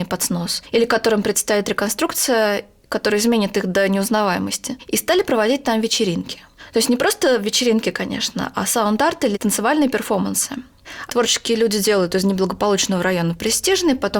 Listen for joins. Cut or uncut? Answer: cut